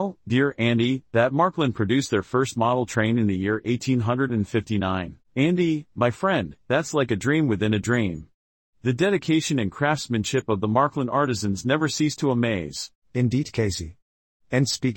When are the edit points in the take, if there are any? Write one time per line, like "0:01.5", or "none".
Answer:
0:05.2